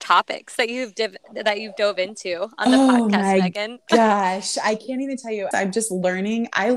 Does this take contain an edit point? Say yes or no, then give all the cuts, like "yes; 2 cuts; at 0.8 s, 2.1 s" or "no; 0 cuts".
yes; 1 cut; at 5.5 s